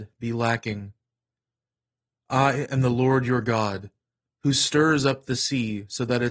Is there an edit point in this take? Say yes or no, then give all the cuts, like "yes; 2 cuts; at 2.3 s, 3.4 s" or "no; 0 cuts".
no; 0 cuts